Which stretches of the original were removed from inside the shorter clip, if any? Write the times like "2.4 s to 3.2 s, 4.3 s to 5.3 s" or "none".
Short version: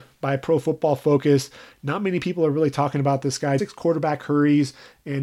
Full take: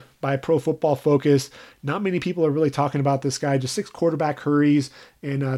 3.6 s to 3.7 s